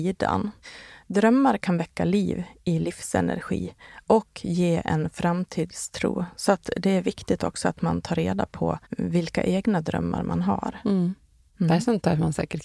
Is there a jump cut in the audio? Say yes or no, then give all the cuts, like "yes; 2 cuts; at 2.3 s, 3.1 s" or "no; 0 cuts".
yes; 1 cut; at 8.8 s